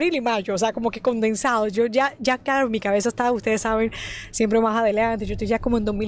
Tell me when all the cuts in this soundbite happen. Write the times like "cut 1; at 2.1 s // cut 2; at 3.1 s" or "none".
cut 1; at 1.7 s